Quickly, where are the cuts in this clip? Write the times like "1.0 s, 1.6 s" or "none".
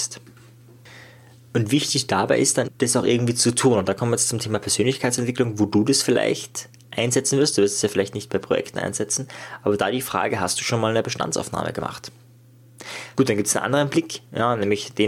2.7 s, 13.1 s